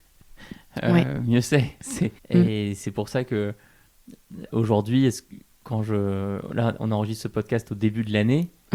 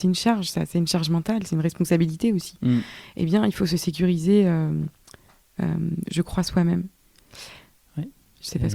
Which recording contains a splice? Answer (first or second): first